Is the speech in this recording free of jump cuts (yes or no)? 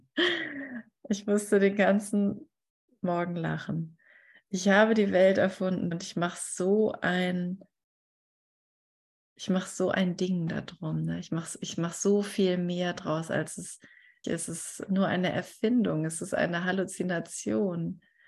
no